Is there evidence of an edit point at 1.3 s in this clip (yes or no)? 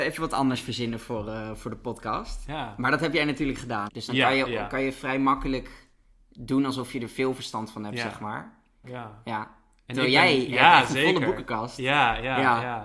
no